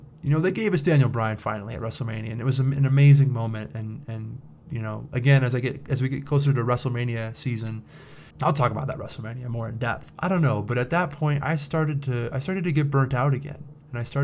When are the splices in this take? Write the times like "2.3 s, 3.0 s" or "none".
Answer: 8.3 s, 10.1 s